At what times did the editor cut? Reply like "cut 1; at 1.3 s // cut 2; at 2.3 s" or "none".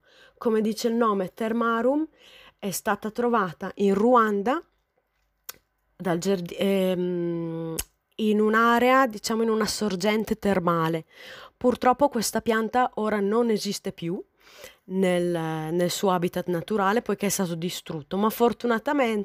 none

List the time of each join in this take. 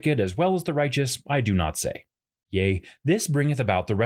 cut 1; at 2.4 s

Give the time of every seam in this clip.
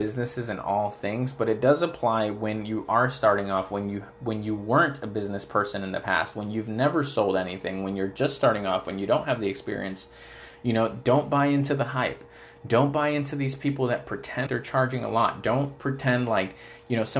cut 1; at 14.5 s

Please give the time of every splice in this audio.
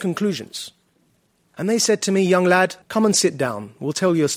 cut 1; at 1.5 s // cut 2; at 2.8 s

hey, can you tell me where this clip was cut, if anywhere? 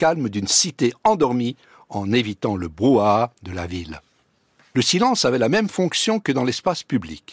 none

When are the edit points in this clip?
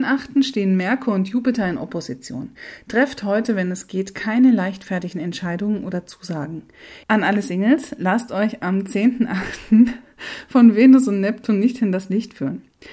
cut 1; at 7.0 s

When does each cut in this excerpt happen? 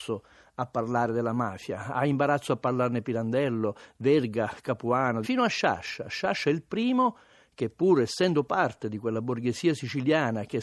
cut 1; at 5.2 s

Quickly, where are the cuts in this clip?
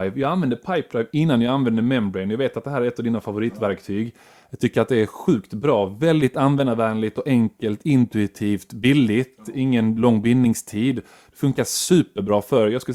none

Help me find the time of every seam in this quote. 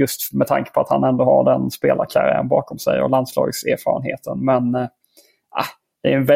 none

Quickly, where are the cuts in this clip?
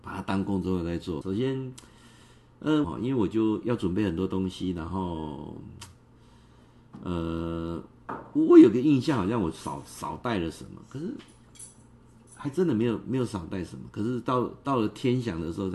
cut 1; at 1.2 s // cut 2; at 2.8 s

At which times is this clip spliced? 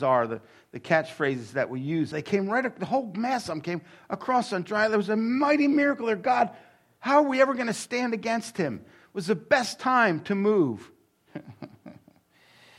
cut 1; at 2.1 s

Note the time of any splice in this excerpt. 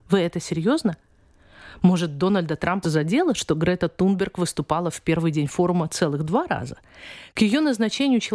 cut 1; at 2.8 s

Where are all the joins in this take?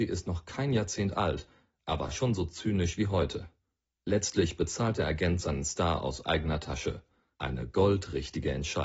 none

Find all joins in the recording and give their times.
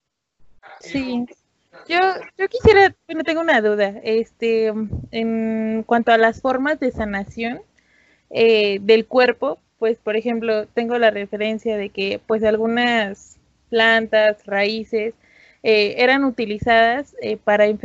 none

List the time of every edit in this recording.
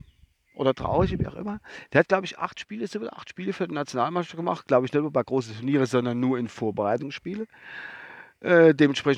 none

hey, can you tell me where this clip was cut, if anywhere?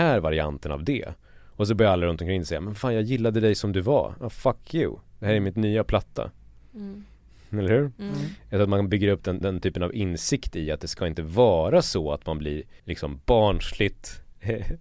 cut 1; at 9.4 s // cut 2; at 12.8 s

